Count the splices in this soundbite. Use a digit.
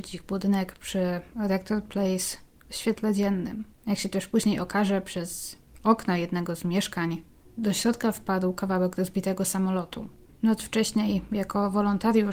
2